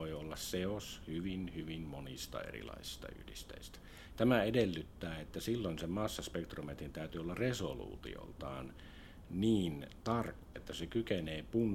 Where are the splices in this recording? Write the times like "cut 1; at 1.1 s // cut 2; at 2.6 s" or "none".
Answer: cut 1; at 4.1 s // cut 2; at 10.5 s